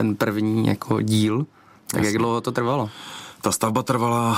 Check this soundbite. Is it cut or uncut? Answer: uncut